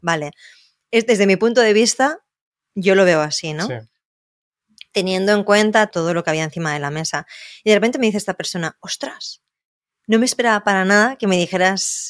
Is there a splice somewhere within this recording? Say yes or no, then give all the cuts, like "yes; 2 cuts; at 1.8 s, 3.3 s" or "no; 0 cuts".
yes; 1 cut; at 5.9 s